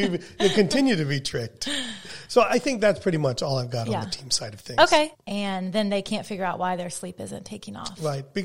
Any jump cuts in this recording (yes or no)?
yes